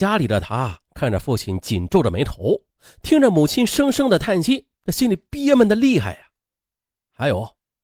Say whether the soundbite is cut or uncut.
cut